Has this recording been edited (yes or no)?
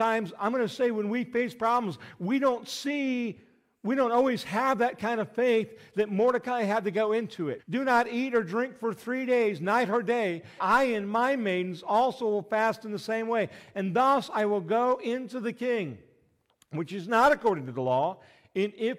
yes